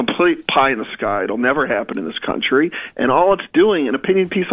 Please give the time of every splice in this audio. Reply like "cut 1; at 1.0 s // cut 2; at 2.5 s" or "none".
none